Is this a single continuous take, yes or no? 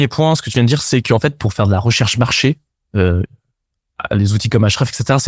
yes